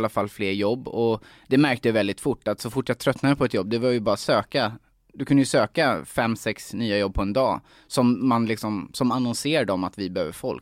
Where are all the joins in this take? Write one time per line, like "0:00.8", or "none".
none